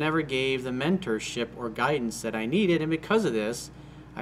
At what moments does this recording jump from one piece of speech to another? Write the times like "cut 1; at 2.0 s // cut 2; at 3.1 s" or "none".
none